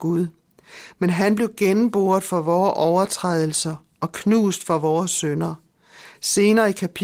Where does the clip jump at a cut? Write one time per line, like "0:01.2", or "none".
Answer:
0:06.1